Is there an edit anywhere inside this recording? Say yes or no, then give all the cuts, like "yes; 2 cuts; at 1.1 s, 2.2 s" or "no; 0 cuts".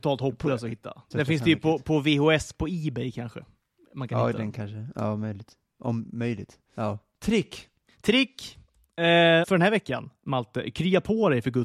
yes; 2 cuts; at 1.1 s, 9.4 s